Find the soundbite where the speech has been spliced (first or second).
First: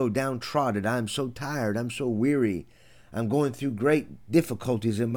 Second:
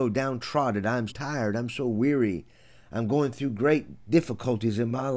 second